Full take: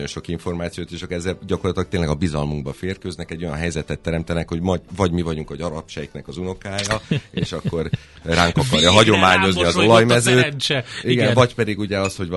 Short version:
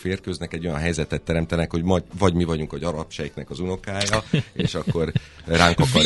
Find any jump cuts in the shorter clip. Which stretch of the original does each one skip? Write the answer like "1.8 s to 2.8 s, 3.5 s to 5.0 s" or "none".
none